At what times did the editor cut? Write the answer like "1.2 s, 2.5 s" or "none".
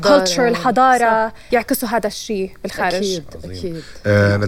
1.5 s